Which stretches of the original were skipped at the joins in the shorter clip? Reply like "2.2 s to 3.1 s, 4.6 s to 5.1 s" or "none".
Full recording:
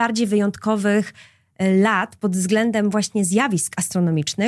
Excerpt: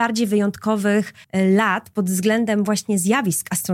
1.2 s to 1.5 s